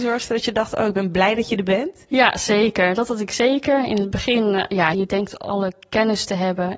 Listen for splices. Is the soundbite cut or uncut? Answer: cut